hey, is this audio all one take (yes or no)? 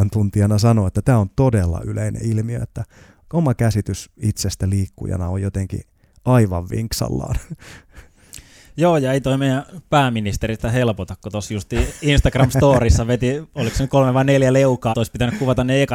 no